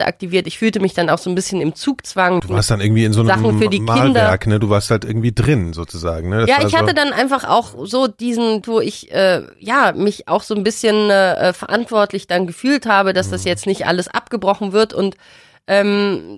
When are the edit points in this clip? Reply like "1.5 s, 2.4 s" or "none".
2.4 s, 8.6 s